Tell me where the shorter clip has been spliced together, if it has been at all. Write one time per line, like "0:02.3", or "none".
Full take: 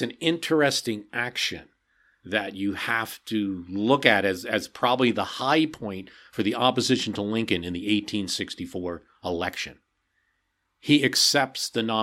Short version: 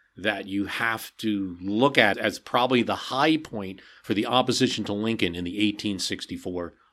0:02.1